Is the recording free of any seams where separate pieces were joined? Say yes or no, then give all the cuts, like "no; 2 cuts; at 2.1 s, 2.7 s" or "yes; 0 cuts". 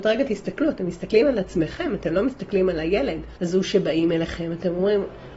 no; 1 cut; at 3.4 s